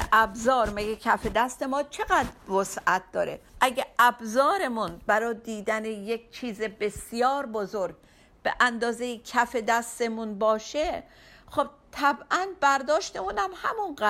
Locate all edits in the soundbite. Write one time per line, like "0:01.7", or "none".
0:03.5